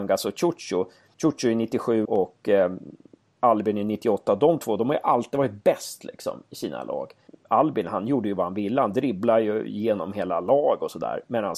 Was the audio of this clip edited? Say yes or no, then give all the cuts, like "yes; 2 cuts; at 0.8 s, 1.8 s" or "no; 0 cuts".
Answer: yes; 1 cut; at 2.1 s